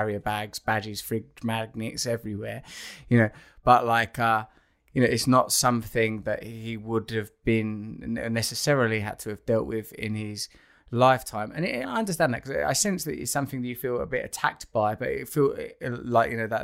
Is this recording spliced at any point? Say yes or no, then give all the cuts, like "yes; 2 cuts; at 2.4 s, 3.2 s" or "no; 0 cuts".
yes; 1 cut; at 11.8 s